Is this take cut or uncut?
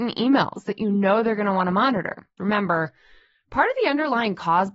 cut